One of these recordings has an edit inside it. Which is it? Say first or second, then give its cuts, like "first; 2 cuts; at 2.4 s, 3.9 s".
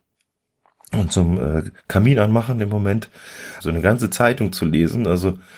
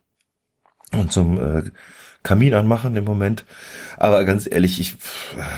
first; 2 cuts; at 1.8 s, 3.6 s